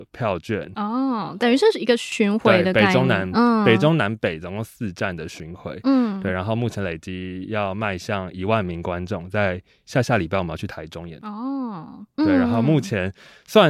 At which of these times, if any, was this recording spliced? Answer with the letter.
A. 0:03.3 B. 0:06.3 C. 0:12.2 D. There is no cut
C